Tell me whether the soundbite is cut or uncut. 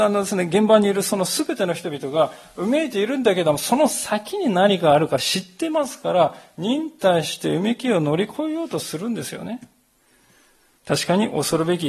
cut